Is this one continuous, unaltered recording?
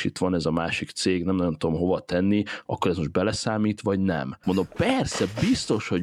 no; 1 cut; at 4.4 s

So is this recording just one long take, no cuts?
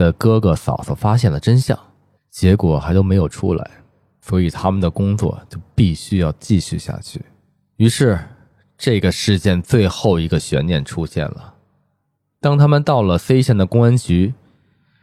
no; 1 cut; at 2.2 s

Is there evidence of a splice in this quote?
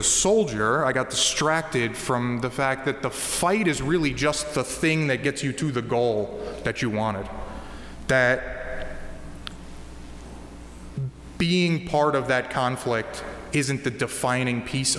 no; 0 cuts

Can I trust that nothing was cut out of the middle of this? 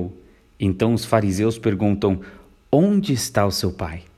yes; 0 cuts

